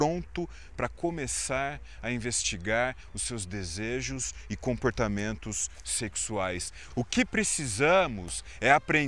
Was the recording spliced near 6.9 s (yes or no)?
yes